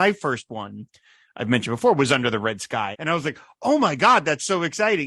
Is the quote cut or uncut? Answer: cut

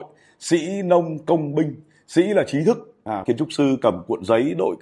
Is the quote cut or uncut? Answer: cut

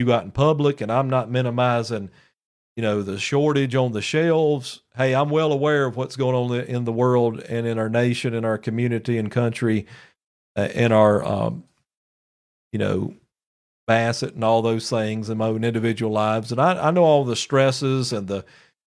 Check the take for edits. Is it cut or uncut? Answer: uncut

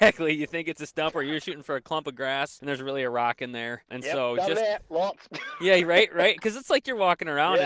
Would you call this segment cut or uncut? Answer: uncut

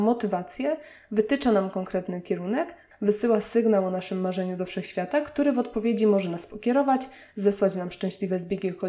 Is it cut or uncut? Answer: cut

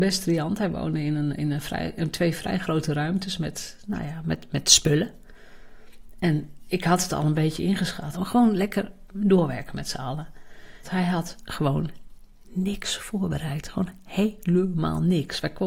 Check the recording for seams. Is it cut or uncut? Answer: cut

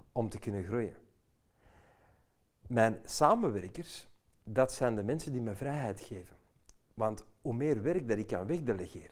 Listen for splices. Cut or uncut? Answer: uncut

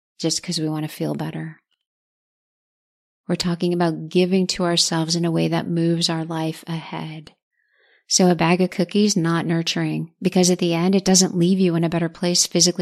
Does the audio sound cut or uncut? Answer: uncut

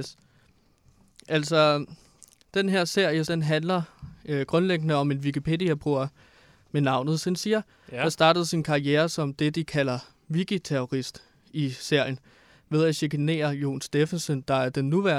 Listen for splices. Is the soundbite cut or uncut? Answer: cut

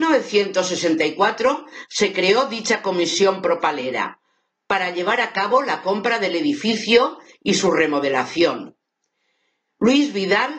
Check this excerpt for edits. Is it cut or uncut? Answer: uncut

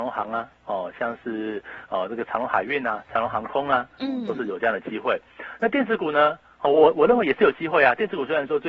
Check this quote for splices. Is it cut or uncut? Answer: uncut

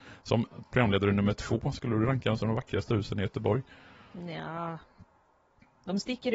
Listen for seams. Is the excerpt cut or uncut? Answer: uncut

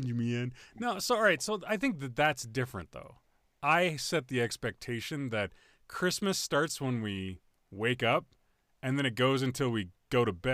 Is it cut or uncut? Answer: uncut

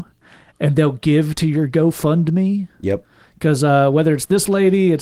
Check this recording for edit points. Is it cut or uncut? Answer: uncut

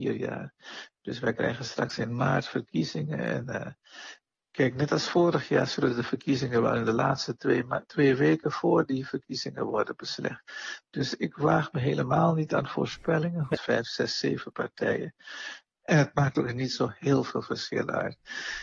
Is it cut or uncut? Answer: cut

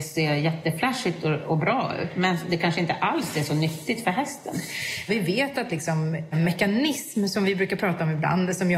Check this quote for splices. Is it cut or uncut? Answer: cut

